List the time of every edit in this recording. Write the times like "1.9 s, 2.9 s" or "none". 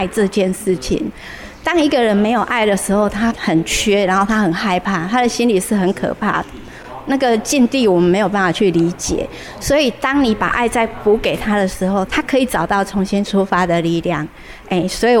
3.3 s, 12.1 s